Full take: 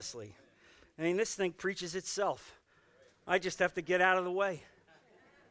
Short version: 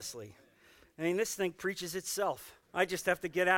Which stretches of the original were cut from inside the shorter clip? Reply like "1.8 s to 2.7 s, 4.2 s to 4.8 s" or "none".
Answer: 2.6 s to 3.2 s

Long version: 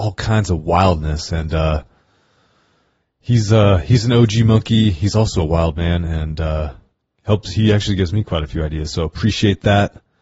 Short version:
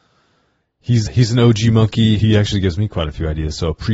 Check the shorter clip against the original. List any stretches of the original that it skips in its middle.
3.5 s to 3.8 s, 4.9 s to 7.5 s

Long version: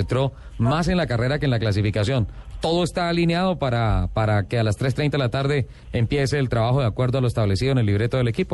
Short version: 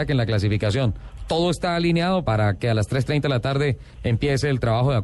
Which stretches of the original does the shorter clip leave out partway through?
3.6 s to 4.1 s

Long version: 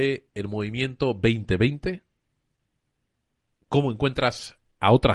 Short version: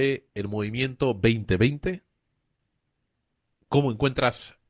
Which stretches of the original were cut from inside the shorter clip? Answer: none

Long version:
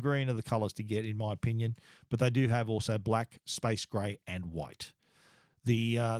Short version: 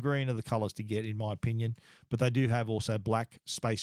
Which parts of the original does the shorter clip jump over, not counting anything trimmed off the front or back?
none

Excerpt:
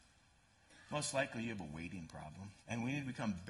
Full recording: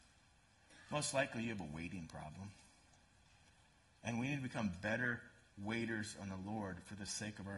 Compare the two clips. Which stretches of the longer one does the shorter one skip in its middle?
2.6 s to 4.0 s

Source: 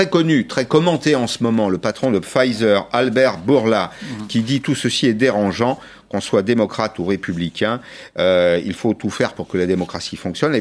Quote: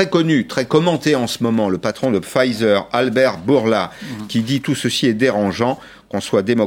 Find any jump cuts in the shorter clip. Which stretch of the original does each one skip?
none

